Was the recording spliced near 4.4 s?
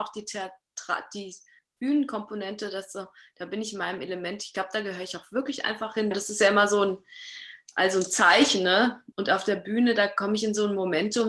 no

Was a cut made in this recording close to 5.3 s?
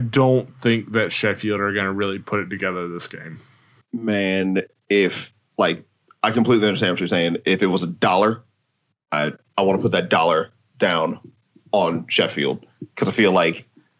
no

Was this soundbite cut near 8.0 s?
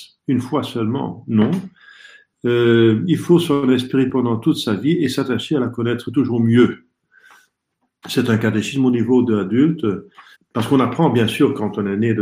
yes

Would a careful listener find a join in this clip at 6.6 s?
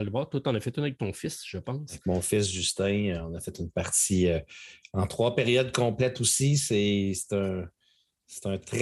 no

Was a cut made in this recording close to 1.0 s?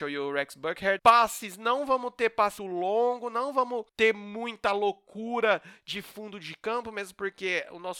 no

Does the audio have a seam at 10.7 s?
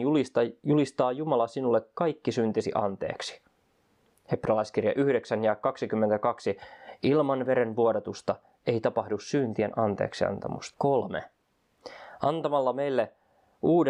yes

